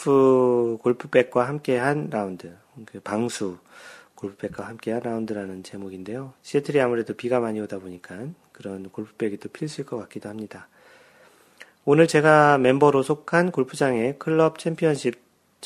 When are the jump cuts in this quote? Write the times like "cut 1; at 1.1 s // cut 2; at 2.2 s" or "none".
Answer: cut 1; at 6.4 s